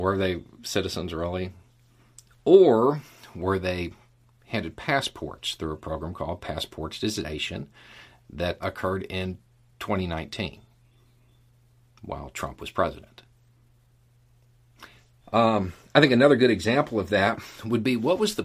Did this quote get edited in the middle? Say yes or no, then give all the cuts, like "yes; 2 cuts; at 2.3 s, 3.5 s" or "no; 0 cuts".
yes; 2 cuts; at 8.6 s, 15.2 s